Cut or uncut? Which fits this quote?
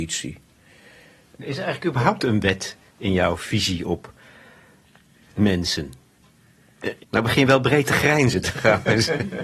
cut